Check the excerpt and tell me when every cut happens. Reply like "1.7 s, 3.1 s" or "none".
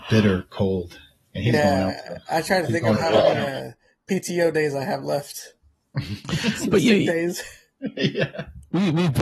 none